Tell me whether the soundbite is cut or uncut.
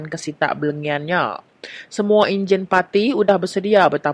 uncut